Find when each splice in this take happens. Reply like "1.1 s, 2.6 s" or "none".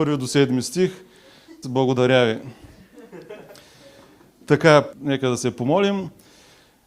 1.6 s, 4.9 s